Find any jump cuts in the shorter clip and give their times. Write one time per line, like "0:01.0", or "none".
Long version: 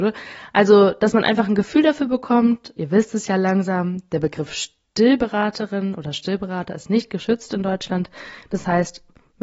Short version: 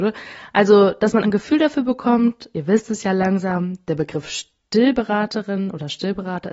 0:01.2